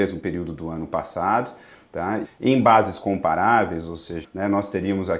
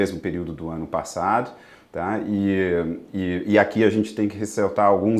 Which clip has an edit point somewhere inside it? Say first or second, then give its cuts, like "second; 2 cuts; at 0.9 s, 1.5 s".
first; 2 cuts; at 2.2 s, 4.2 s